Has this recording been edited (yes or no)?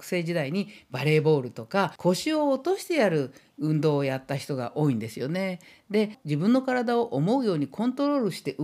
no